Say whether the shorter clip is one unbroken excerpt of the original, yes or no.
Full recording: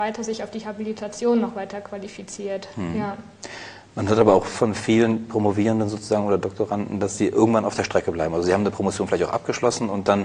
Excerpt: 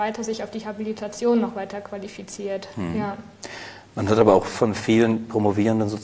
yes